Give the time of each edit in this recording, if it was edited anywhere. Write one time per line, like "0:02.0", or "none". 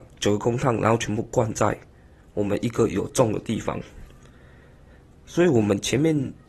none